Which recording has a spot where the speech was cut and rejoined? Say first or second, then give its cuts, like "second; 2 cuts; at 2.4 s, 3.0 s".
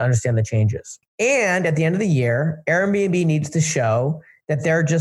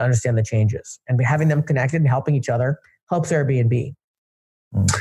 first; 1 cut; at 1.0 s